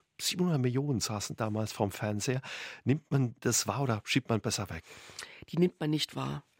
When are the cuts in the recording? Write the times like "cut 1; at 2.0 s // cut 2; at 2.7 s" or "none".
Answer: none